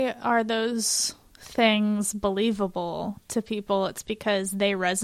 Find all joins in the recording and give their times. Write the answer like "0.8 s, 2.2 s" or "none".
none